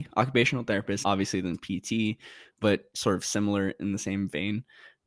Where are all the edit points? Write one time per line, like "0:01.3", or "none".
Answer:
0:01.0